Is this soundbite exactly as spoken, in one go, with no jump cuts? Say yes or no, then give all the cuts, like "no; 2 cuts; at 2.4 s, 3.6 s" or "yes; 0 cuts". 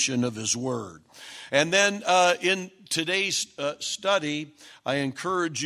no; 1 cut; at 1.5 s